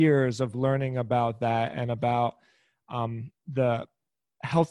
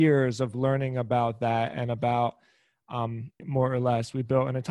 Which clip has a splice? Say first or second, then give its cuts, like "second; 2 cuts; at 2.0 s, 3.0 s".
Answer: second; 1 cut; at 3.4 s